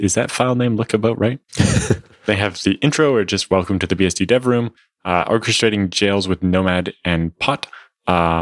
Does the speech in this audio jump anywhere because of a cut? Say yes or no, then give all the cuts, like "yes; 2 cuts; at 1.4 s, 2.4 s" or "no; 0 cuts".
no; 0 cuts